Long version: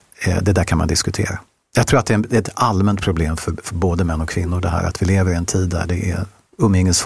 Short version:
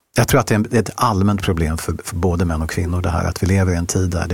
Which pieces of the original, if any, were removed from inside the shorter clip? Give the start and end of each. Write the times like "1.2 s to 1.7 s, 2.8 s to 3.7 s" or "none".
none